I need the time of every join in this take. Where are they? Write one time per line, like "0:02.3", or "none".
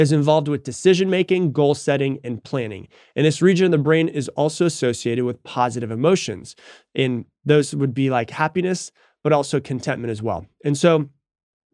none